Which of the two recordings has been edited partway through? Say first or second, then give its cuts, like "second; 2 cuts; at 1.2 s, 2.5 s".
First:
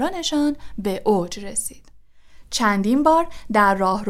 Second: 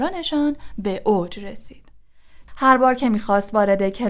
second; 1 cut; at 2.5 s